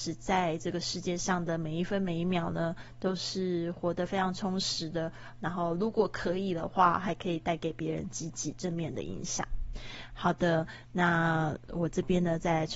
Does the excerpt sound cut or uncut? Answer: uncut